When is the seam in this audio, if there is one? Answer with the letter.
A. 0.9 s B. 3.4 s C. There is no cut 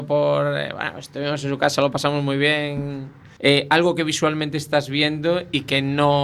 B